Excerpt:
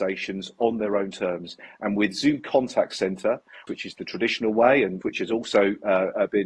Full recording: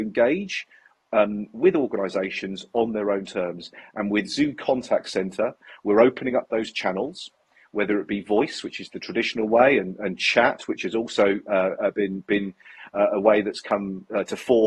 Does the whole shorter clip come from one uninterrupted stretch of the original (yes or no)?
no